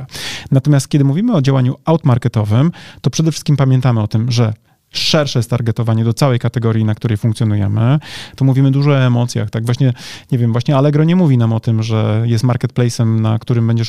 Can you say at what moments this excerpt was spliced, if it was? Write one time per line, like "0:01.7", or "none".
0:08.4